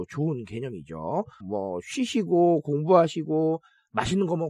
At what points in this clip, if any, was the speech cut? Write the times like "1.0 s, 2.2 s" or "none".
1.4 s